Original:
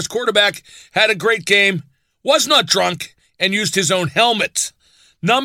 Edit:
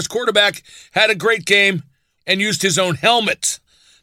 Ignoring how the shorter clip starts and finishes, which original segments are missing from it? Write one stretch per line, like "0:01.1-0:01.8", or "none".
0:02.2-0:03.3